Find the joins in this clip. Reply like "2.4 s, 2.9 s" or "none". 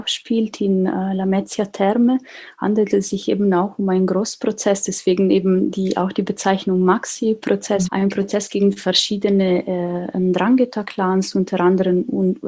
7.8 s